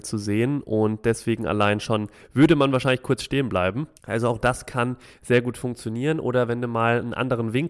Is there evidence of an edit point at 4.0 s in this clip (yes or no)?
yes